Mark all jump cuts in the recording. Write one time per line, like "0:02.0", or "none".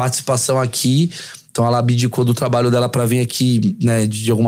none